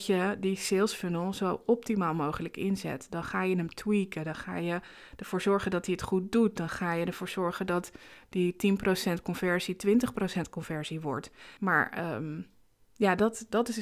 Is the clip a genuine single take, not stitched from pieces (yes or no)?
no